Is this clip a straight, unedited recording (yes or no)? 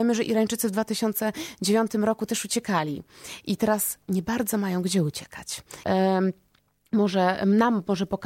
no